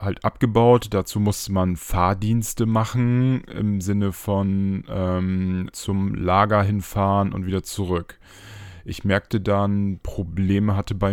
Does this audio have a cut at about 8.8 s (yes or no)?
no